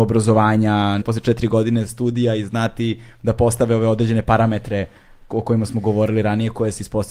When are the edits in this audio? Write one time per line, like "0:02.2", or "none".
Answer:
0:01.0